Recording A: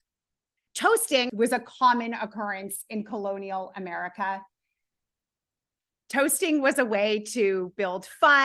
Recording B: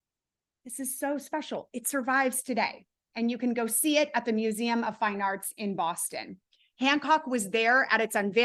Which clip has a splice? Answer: A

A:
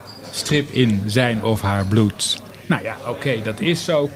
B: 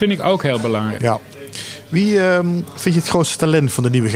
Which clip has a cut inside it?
B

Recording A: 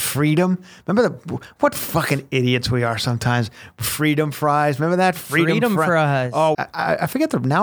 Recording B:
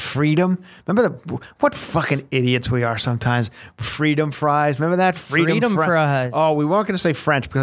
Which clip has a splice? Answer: A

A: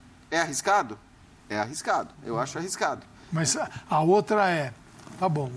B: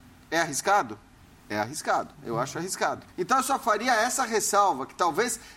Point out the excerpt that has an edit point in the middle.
B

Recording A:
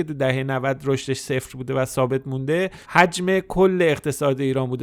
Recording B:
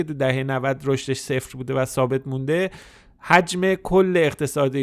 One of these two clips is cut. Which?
A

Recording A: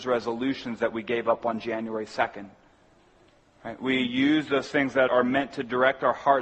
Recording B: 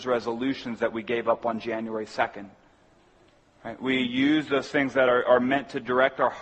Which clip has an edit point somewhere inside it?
A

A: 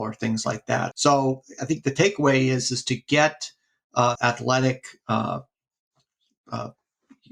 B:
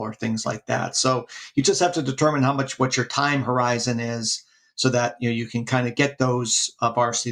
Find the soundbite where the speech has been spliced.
A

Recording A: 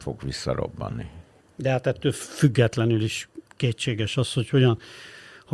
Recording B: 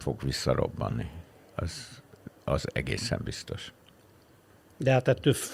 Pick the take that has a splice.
A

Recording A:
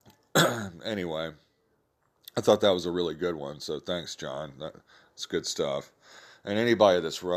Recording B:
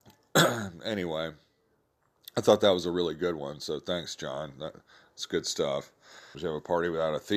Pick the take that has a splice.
B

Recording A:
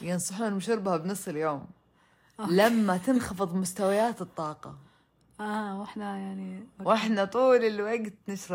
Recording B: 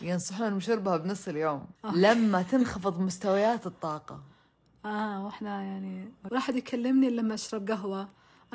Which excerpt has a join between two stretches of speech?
B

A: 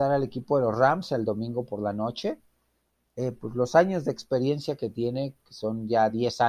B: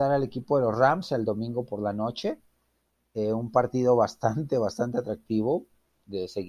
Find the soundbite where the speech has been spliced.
A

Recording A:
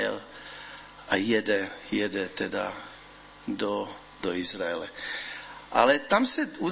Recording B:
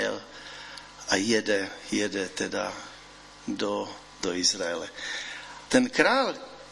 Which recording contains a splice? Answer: B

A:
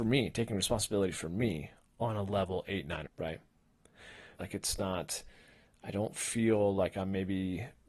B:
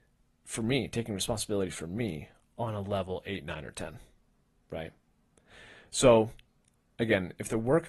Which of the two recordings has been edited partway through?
A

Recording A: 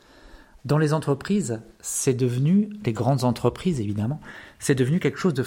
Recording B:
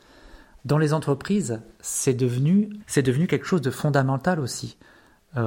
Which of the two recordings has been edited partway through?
B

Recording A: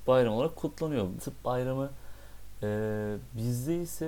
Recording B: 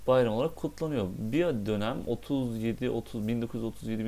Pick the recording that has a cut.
A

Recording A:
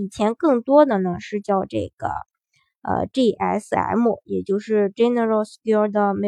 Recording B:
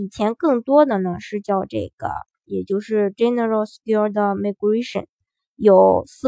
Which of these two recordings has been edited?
B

